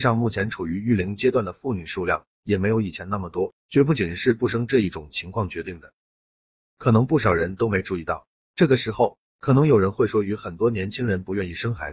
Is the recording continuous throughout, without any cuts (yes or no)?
no